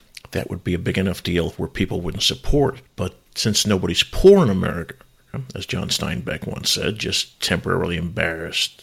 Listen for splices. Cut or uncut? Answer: cut